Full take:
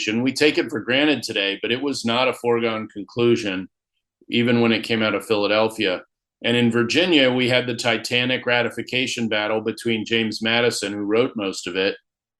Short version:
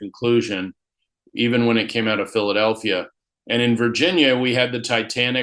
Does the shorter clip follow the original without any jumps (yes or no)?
yes